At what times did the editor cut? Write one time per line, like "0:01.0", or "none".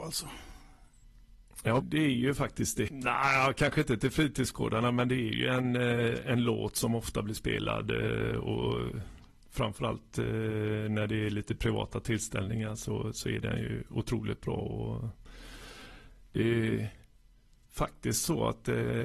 0:01.8
0:02.9